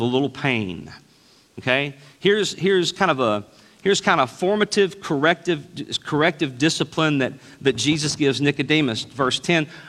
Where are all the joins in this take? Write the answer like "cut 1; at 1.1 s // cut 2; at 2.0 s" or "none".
none